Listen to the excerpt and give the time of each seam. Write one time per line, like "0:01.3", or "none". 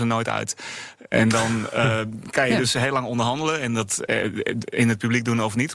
none